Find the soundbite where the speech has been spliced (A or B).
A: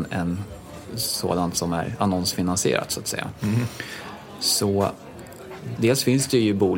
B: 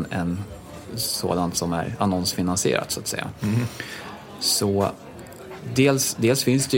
A